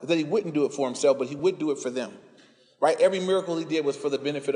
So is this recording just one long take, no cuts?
yes; 0 cuts

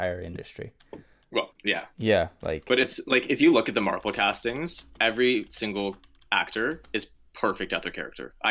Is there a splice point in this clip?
no; 0 cuts

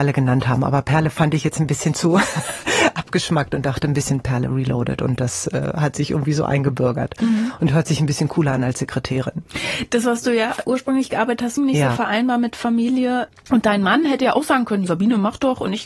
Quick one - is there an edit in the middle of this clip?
yes; 2 cuts; at 11.6 s, 14.9 s

